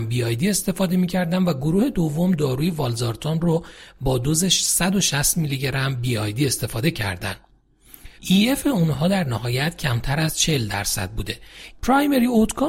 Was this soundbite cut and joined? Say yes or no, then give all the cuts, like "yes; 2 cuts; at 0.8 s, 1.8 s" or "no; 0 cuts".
yes; 2 cuts; at 8.2 s, 11.7 s